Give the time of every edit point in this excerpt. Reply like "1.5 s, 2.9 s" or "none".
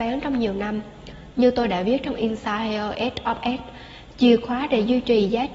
1.3 s